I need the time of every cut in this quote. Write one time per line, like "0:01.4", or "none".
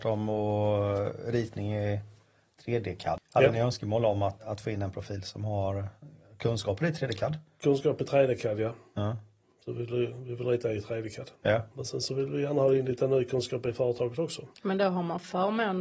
0:04.4
0:11.7
0:14.5